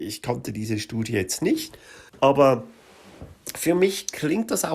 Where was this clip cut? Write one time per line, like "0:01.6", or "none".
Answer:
0:02.1